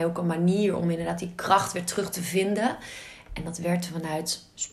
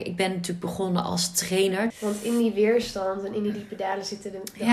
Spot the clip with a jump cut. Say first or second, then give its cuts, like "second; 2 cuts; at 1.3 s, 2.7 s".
second; 1 cut; at 1.9 s